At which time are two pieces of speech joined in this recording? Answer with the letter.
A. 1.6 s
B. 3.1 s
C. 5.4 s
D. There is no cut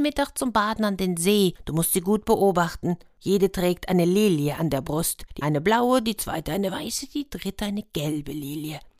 C